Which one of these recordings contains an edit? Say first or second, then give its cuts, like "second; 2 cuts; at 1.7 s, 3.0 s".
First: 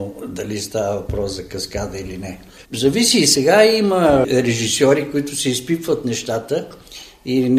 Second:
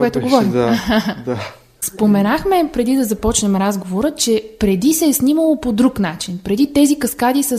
first; 1 cut; at 2.6 s